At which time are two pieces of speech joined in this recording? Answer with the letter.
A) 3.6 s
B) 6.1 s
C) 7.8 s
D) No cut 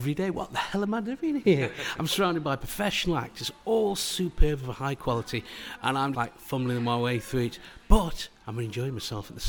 B